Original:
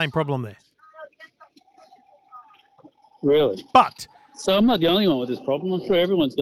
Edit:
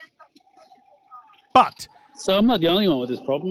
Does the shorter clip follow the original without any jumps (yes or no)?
no